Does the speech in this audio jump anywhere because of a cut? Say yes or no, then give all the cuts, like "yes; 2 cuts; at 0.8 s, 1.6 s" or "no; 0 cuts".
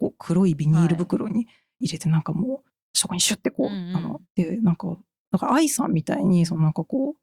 yes; 1 cut; at 4.2 s